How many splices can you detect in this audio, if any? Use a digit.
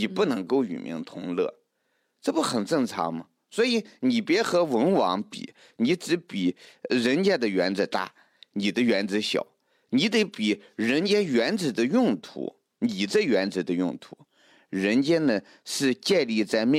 0